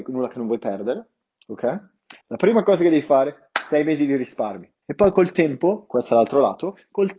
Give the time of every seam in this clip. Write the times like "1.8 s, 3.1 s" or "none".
2.2 s, 4.8 s